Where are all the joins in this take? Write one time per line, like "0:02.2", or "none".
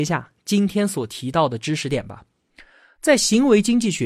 none